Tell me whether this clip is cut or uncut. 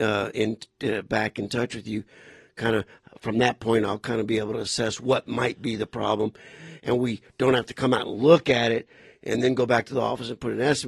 uncut